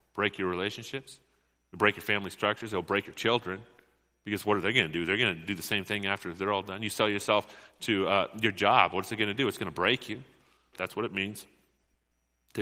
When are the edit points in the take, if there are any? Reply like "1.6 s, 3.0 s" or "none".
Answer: 10.7 s